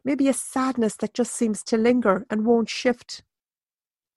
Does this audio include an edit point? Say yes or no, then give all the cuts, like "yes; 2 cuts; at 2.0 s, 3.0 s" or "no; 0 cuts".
no; 0 cuts